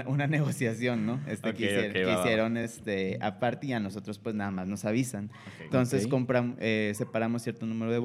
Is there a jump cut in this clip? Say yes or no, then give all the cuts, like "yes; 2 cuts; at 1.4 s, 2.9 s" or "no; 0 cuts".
no; 0 cuts